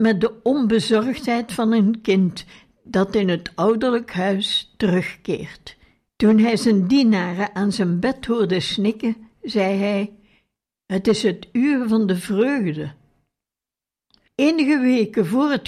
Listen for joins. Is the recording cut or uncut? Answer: cut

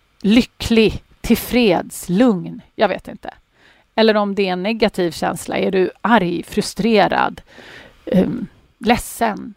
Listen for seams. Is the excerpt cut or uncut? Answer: uncut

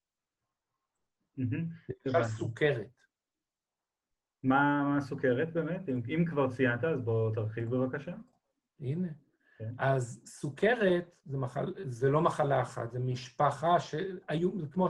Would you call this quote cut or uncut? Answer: uncut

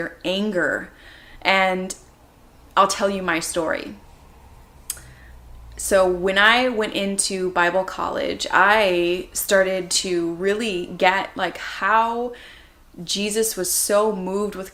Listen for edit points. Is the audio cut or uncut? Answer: uncut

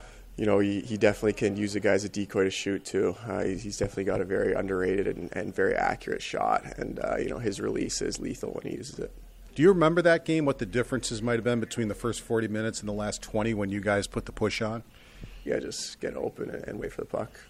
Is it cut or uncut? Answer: cut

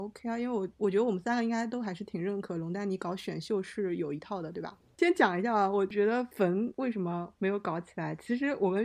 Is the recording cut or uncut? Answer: cut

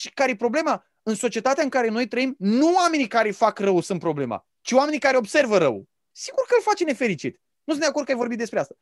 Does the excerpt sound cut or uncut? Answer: cut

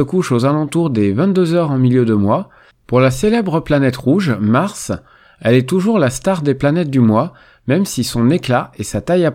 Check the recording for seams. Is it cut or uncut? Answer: cut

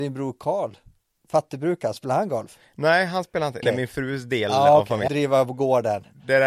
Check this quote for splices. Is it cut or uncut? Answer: cut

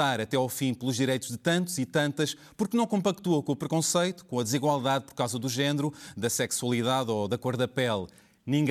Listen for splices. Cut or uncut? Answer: uncut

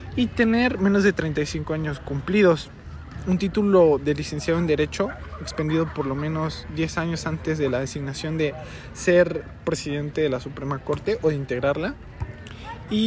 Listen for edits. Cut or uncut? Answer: uncut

